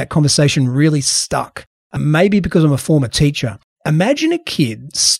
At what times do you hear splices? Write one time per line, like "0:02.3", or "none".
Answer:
0:03.8